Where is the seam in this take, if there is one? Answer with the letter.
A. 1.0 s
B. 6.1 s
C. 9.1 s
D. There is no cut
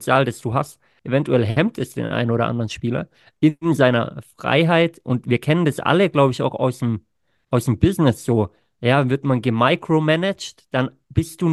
A